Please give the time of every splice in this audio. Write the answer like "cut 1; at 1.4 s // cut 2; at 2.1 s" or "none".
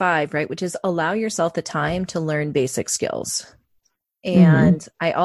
cut 1; at 4.1 s